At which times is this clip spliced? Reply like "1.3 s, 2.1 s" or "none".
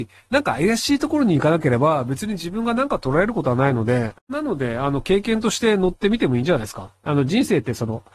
4.2 s